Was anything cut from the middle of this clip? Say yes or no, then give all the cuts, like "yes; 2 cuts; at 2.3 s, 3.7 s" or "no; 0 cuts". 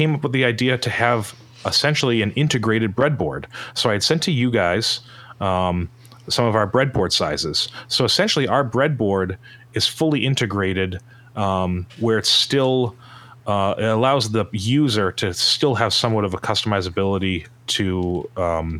no; 0 cuts